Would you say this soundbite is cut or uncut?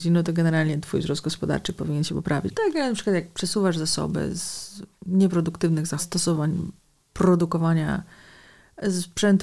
cut